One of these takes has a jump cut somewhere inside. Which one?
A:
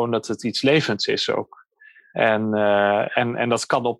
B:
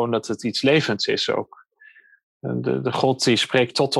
A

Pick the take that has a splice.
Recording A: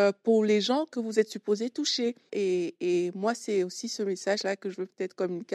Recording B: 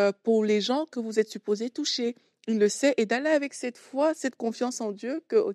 A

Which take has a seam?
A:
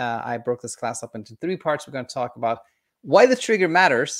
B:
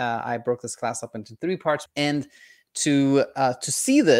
B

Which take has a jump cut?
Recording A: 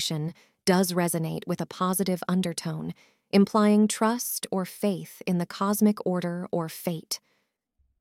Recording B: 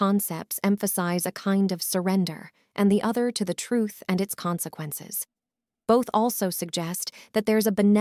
B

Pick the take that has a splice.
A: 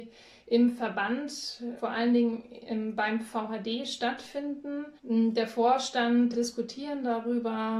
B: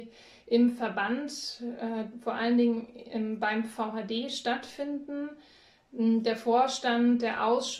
A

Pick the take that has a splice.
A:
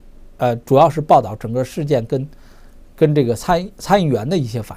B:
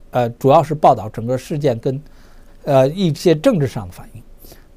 B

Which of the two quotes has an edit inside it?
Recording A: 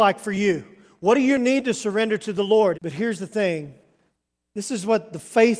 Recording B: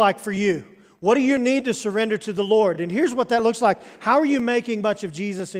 A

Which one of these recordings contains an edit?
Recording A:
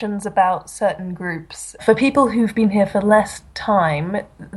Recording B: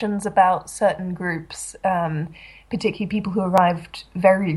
A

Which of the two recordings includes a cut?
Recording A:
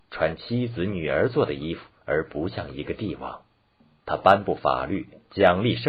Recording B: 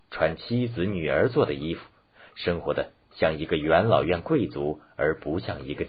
A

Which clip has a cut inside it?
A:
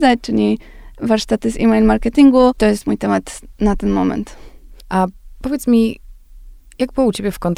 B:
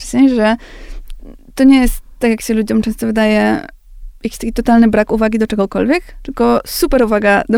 A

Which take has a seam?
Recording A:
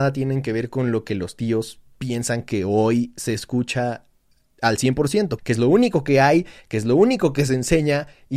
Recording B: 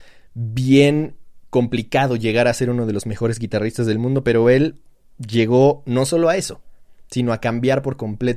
A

